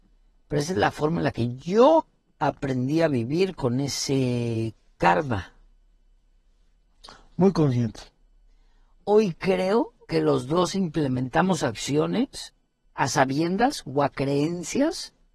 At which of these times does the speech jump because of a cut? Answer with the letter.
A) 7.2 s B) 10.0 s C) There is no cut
B